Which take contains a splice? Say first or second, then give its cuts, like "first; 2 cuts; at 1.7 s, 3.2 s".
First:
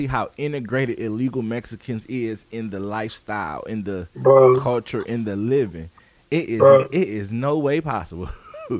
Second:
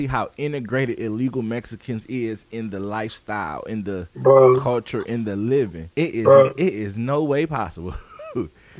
second; 1 cut; at 5.9 s